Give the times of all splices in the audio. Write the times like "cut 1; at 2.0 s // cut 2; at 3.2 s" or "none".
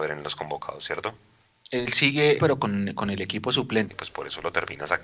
cut 1; at 2.4 s // cut 2; at 3.9 s